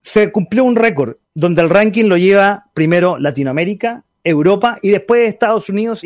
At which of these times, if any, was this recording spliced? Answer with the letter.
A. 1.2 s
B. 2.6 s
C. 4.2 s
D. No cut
A